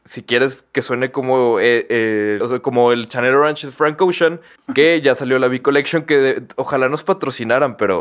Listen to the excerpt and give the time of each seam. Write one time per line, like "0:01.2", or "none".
0:02.4
0:04.6